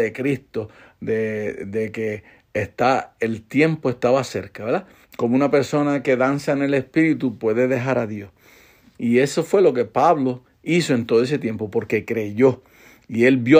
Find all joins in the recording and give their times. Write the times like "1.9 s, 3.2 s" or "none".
5.0 s, 8.9 s